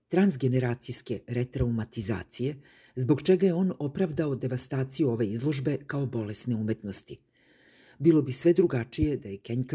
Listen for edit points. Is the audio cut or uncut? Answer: uncut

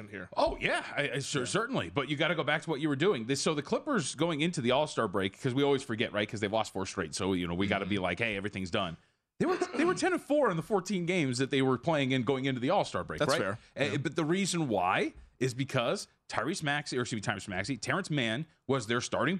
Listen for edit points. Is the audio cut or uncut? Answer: uncut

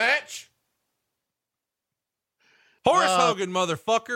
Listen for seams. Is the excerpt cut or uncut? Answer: cut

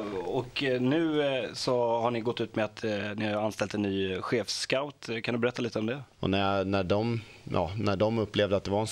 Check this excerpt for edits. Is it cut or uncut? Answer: cut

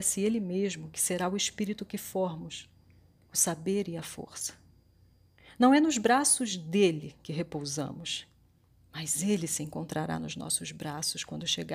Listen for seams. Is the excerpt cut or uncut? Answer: uncut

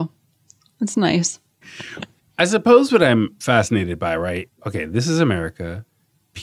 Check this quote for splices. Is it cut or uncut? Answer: cut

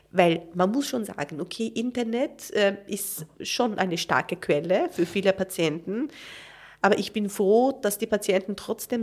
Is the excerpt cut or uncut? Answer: uncut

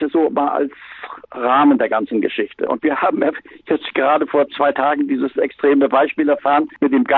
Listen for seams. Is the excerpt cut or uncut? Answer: cut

